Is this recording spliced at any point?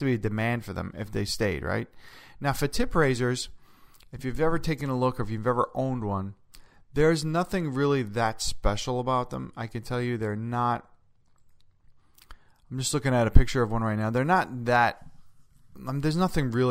no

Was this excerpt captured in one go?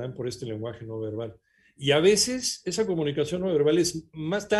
yes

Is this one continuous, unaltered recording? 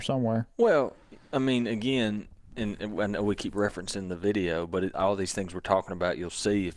yes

